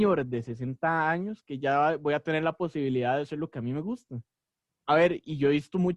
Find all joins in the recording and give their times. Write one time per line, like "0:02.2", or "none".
0:04.7